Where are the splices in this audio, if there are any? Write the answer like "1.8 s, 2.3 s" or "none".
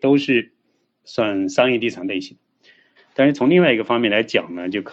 1.0 s, 3.0 s